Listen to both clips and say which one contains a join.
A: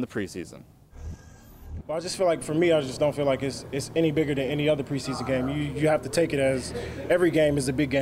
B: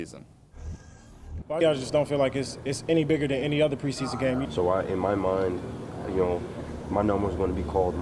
B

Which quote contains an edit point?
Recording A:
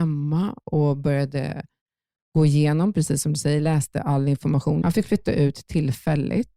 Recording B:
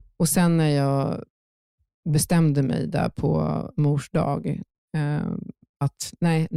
A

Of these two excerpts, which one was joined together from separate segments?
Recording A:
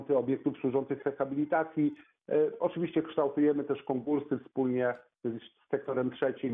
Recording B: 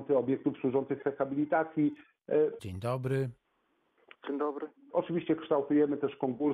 B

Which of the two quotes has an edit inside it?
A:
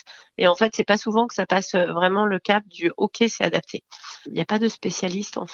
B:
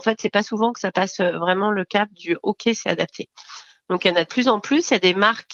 A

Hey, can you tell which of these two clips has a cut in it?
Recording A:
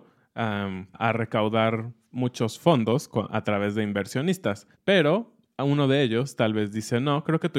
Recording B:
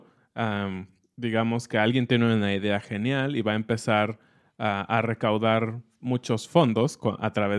A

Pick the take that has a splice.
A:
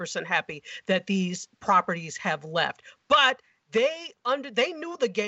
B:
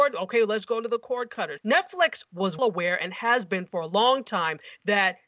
B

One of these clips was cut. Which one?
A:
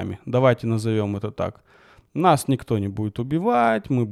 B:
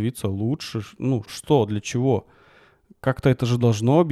B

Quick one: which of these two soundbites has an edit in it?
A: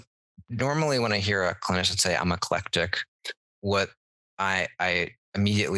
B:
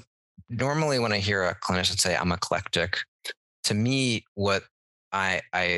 A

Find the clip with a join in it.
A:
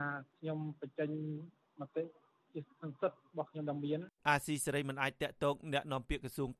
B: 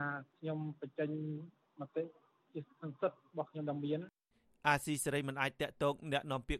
A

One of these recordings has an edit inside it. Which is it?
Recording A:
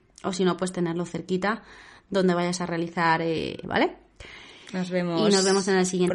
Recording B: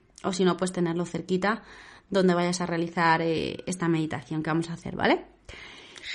A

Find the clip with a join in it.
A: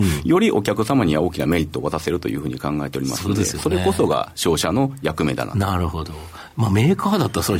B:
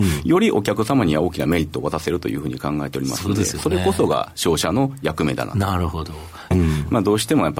B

